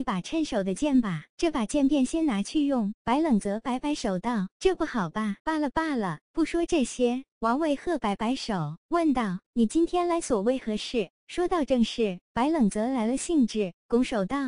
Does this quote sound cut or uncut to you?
cut